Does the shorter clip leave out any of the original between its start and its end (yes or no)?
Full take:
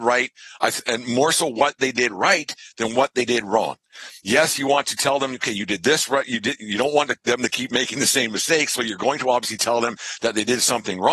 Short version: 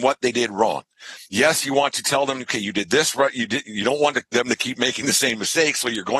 no